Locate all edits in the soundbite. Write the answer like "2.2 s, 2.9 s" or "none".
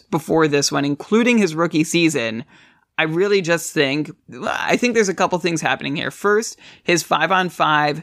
none

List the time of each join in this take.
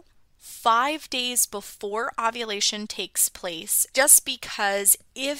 3.9 s

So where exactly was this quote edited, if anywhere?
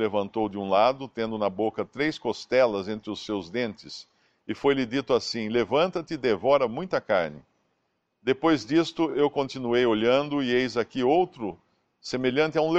none

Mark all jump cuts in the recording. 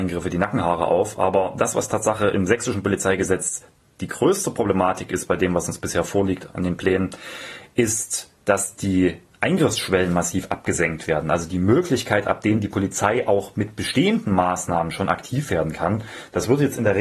none

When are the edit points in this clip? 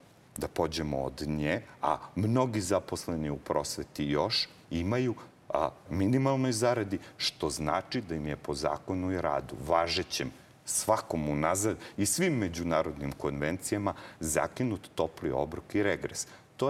4.6 s, 5.9 s

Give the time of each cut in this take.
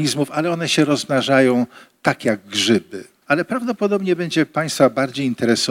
3.2 s

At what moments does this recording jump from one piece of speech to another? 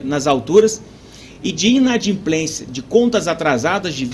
none

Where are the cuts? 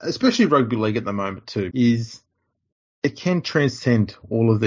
1.7 s

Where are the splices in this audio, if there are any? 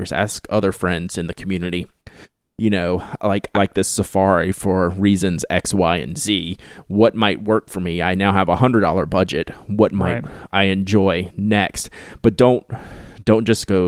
3.5 s

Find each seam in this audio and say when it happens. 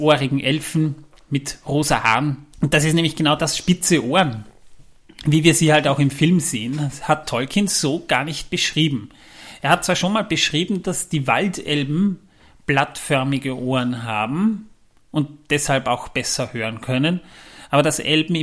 2.5 s

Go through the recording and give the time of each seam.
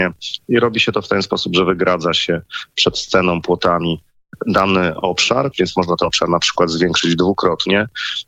5.5 s

